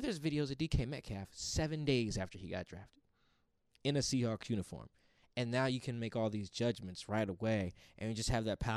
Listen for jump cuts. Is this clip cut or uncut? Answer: uncut